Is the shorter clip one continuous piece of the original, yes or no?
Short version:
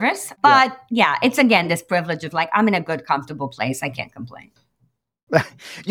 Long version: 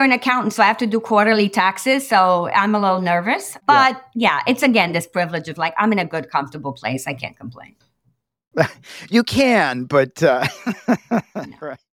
yes